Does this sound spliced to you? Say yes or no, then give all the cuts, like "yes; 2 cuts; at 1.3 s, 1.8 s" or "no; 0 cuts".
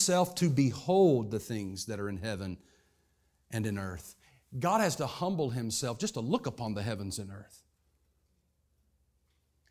no; 0 cuts